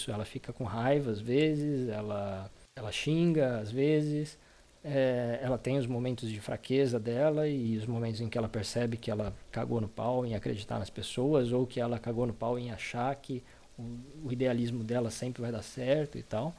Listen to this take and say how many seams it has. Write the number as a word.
zero